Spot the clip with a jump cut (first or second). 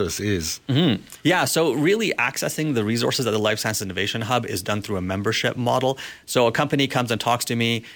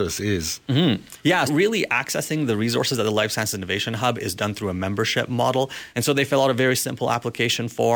second